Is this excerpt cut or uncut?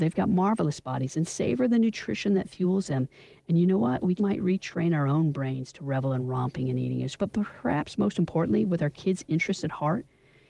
cut